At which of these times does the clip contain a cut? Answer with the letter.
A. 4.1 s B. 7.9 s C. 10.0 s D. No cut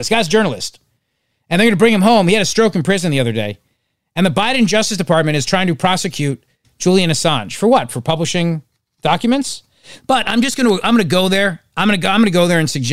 C